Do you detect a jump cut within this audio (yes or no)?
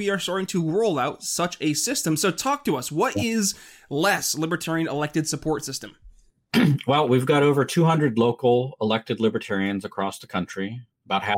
no